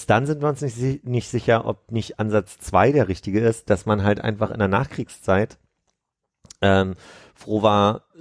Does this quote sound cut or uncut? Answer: uncut